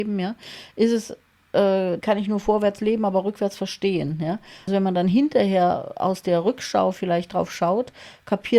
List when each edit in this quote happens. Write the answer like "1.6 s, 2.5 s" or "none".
2.0 s, 4.7 s